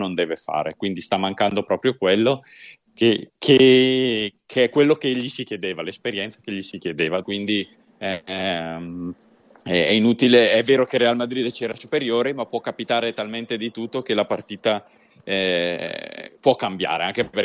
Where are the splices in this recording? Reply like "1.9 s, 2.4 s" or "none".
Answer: 7.2 s

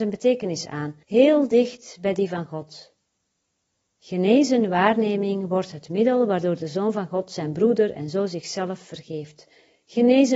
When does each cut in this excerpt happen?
1.0 s

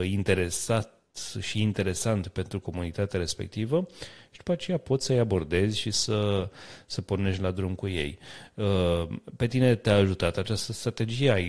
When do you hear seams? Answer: none

